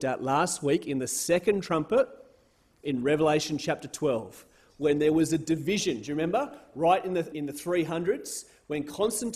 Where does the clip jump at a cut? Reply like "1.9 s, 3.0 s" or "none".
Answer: 7.3 s